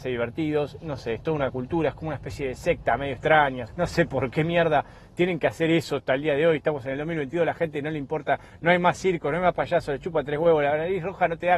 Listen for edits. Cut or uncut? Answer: cut